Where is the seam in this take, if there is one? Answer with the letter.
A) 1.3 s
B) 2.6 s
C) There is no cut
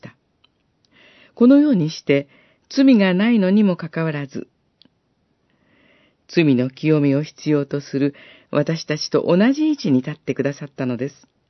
B